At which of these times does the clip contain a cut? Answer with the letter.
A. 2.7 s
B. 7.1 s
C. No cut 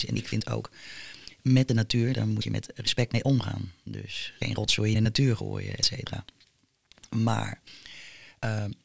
A